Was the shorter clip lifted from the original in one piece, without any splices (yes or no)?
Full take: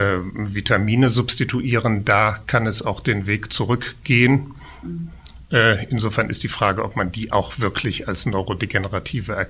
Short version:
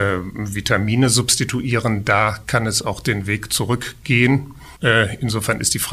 no